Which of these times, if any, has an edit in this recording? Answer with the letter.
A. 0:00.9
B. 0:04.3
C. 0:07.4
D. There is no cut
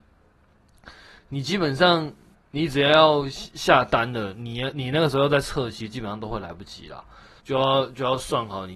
C